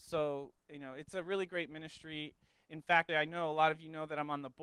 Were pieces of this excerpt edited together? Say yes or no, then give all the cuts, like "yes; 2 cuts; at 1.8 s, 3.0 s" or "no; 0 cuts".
yes; 1 cut; at 3.1 s